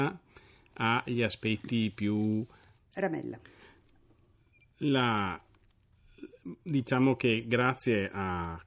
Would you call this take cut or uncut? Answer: cut